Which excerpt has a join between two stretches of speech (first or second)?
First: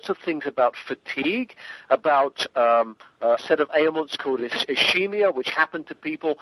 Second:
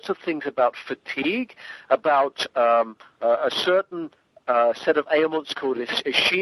first